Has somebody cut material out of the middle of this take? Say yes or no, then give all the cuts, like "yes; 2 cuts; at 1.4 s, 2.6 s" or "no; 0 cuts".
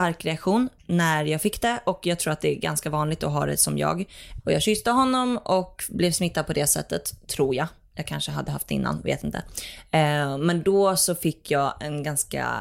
yes; 1 cut; at 4.4 s